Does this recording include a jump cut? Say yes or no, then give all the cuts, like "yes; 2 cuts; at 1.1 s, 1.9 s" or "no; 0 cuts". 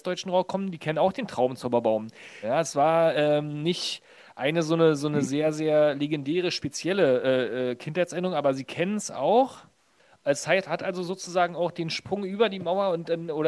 yes; 1 cut; at 2.4 s